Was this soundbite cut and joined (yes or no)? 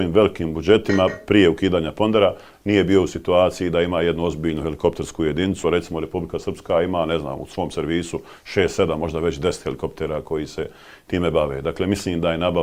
no